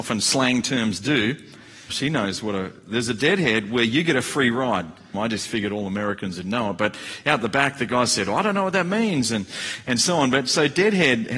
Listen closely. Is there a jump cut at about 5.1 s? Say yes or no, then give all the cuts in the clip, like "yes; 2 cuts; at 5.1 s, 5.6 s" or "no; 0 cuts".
yes; 2 cuts; at 1.9 s, 5.1 s